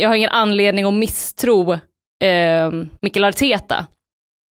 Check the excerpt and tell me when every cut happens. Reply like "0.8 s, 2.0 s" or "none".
3.0 s